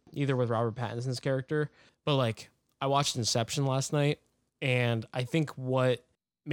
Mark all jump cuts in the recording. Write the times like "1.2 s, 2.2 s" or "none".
1.9 s